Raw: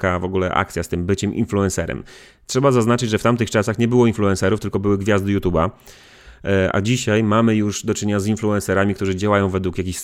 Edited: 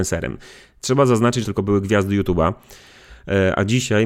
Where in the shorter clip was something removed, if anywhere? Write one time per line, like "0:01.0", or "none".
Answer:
0:01.4